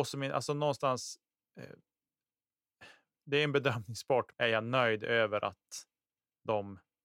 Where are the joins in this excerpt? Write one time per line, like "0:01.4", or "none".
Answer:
0:04.3